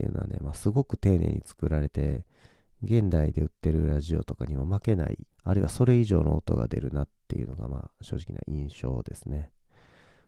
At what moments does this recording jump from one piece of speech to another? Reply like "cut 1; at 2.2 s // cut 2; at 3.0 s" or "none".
cut 1; at 1.9 s // cut 2; at 5.3 s